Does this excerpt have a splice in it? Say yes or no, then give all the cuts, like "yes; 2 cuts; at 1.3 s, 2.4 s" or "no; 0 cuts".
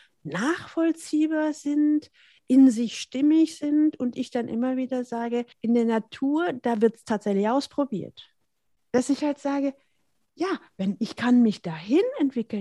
yes; 2 cuts; at 5.5 s, 8.8 s